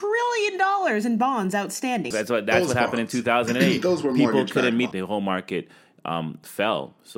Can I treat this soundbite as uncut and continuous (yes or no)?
no